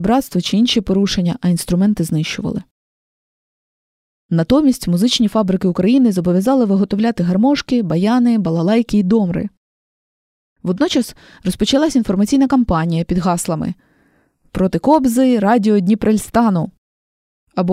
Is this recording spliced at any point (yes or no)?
no